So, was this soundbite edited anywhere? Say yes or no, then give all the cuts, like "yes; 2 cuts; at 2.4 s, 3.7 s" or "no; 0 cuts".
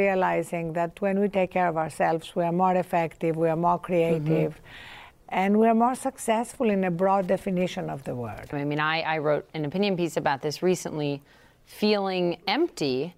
yes; 1 cut; at 8.5 s